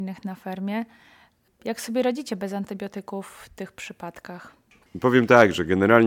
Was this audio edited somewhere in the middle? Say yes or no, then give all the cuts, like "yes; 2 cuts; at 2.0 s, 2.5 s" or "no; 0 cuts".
no; 0 cuts